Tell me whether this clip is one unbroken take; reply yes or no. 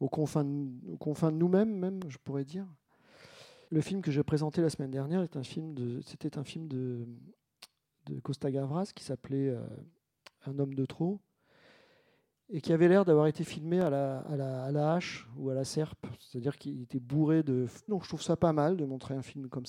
no